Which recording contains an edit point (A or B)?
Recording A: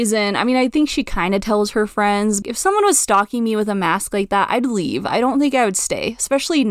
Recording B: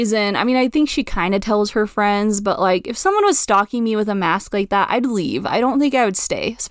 A